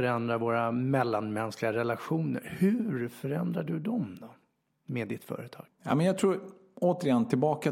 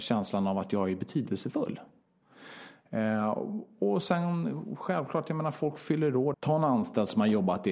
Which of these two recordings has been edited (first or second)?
second